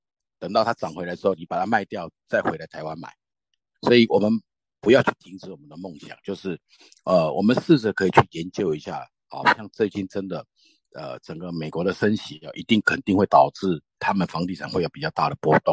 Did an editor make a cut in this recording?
yes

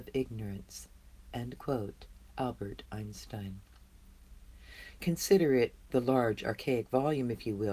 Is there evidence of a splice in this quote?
yes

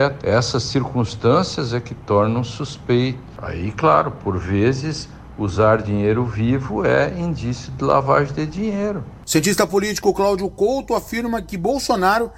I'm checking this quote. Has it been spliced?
no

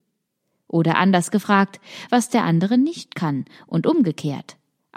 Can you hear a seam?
yes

